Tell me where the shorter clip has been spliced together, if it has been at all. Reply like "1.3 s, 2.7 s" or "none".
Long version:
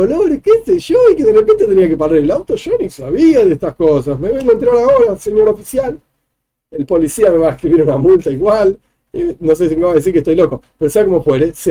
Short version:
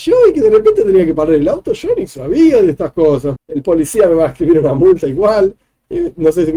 3.4 s